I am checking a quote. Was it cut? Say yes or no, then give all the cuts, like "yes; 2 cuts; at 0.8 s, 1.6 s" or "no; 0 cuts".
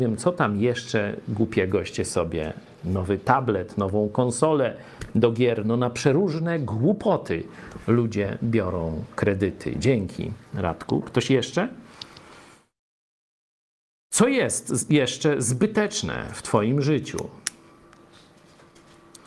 no; 0 cuts